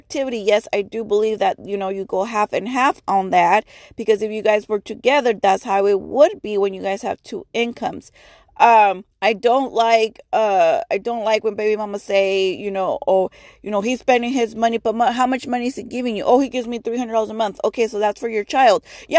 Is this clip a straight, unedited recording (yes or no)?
no